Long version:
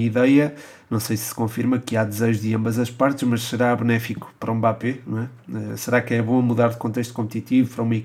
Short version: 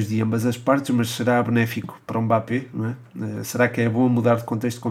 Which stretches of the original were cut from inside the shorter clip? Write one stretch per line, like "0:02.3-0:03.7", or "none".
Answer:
none

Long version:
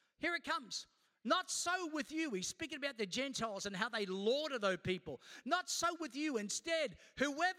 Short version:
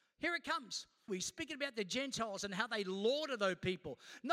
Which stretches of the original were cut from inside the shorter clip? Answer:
0:01.1-0:02.3

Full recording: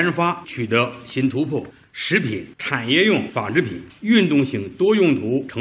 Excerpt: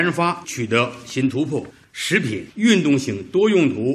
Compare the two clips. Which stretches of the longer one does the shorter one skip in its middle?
0:02.5-0:03.9

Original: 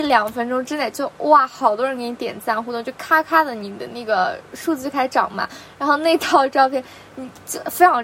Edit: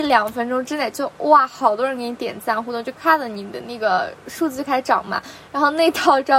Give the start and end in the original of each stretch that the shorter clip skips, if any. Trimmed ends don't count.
0:03.0-0:03.2

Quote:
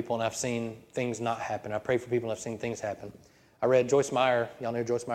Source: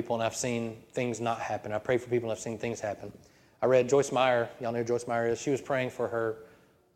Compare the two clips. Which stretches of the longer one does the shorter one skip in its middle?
none

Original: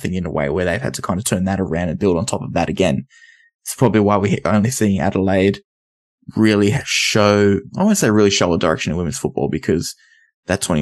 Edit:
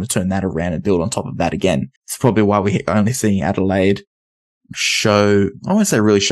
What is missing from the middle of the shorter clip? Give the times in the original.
0:03.1-0:03.5
0:06.3-0:06.8

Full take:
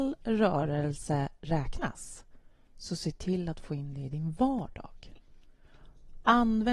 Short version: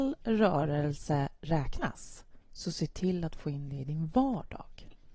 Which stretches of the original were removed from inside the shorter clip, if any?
0:02.4-0:02.7

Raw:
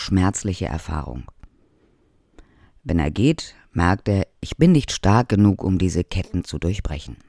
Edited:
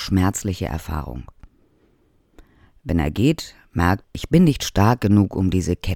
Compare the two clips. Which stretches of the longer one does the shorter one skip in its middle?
0:04.0-0:04.3

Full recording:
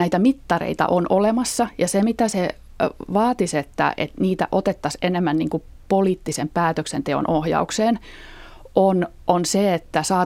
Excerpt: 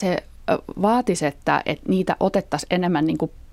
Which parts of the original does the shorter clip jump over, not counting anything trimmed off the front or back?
none

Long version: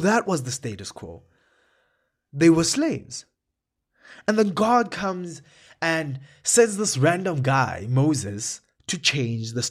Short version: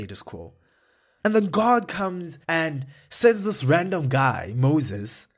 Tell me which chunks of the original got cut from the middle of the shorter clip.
0:01.9-0:04.2
0:05.5-0:05.8

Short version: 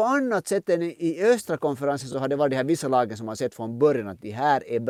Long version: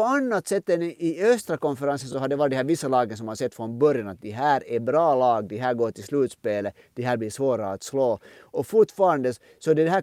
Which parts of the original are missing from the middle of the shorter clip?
none

